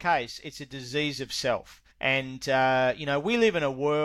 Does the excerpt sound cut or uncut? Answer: cut